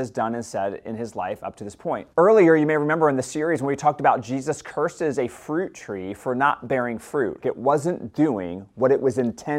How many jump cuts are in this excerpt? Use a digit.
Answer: 2